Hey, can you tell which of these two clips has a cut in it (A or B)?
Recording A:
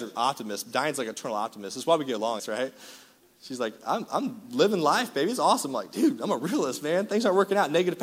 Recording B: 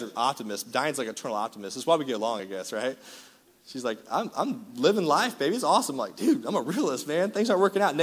A